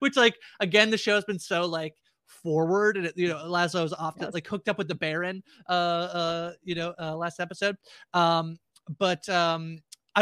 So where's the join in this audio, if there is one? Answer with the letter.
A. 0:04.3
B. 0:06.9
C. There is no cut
C